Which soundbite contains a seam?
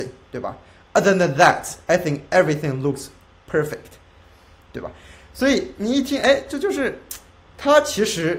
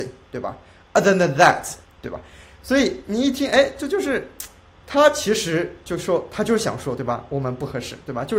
second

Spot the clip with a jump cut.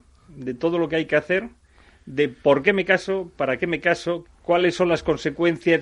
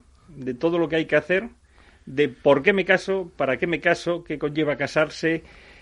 first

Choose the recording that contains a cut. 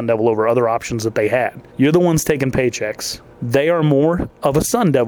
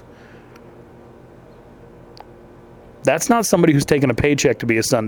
first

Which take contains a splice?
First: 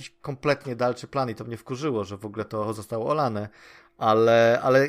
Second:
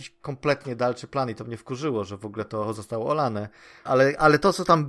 second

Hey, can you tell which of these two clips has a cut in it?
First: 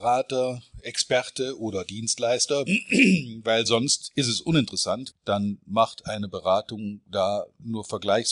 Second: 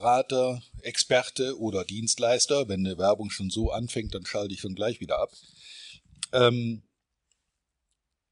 first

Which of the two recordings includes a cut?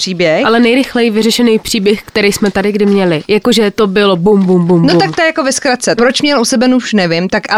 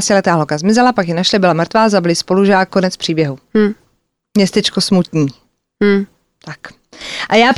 first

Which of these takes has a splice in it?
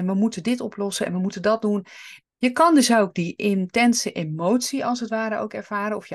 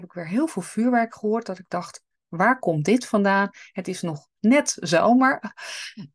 first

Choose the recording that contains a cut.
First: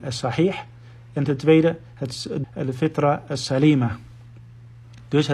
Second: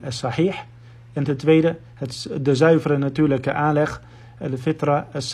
first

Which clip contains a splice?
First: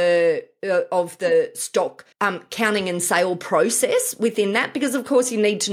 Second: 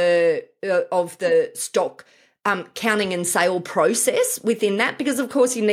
first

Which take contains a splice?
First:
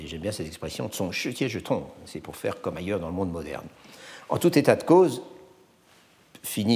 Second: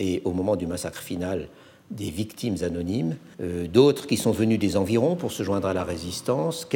second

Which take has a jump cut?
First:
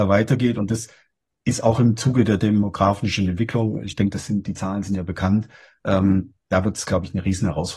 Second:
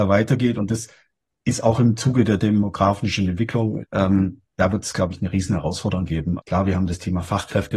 second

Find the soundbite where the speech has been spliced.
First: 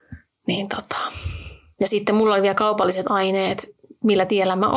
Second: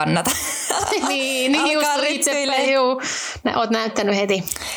second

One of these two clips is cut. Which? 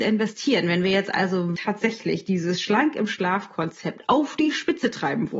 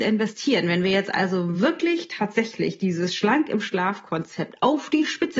first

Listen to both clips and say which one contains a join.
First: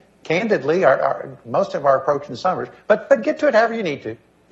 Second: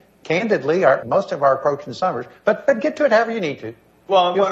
second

